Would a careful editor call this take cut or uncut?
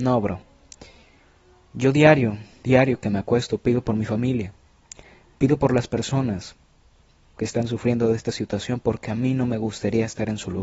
cut